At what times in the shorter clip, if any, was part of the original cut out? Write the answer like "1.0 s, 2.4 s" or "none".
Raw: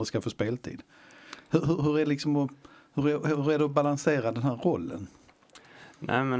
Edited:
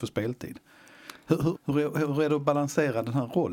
1.5 s